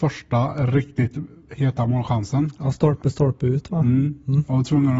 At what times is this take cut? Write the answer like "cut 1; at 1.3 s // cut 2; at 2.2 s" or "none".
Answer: none